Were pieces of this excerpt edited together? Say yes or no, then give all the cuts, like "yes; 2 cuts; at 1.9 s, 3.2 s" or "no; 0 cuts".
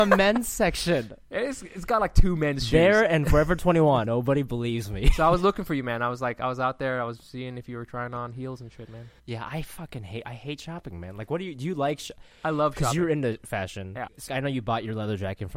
yes; 3 cuts; at 4.0 s, 9.2 s, 14.3 s